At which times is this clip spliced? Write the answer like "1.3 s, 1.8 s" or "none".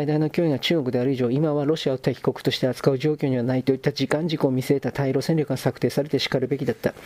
none